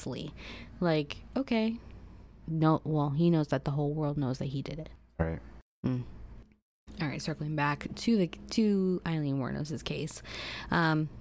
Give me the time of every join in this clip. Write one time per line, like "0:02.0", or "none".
0:02.4